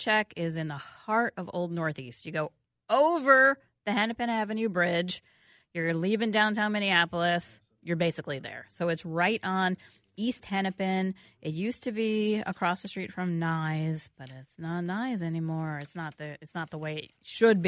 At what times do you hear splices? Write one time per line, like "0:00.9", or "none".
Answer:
none

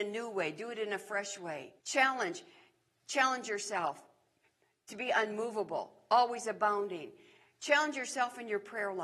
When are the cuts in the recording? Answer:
0:01.8

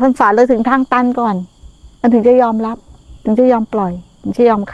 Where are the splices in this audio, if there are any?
0:02.0

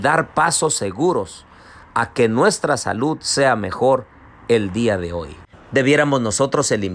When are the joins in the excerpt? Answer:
0:05.5

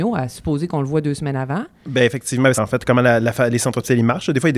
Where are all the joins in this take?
0:02.5

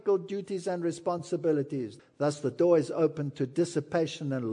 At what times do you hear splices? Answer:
0:02.0

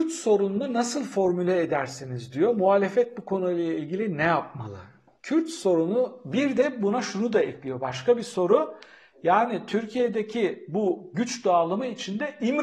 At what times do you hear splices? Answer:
none

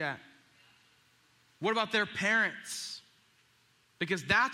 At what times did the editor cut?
none

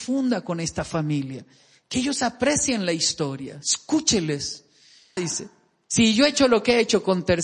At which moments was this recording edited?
0:05.2

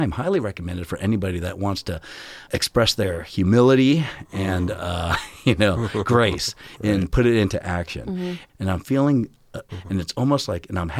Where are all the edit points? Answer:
0:02.5
0:08.5
0:09.7

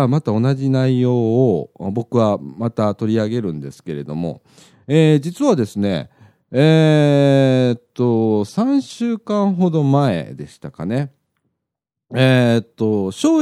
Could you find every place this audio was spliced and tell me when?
none

